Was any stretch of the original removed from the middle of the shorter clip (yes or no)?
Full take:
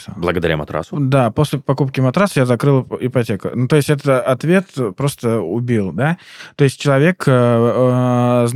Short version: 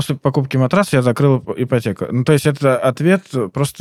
no